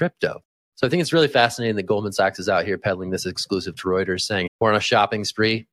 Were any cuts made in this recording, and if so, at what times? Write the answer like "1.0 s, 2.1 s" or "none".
4.5 s

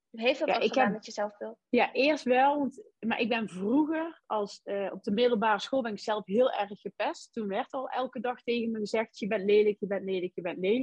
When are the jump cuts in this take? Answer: 1.6 s

